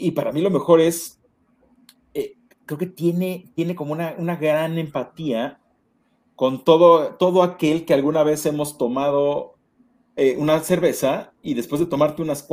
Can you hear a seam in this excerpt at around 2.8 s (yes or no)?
no